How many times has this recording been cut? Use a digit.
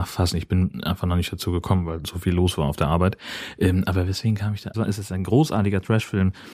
1